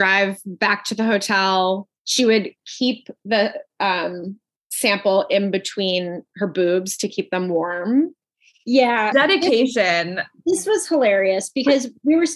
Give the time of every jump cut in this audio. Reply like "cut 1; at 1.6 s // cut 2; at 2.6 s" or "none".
cut 1; at 9.1 s